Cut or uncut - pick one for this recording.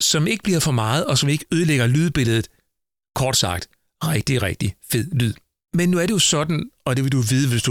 uncut